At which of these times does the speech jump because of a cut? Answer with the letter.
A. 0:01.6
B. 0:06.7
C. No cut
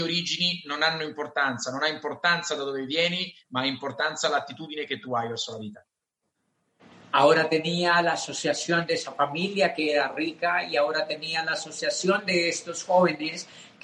C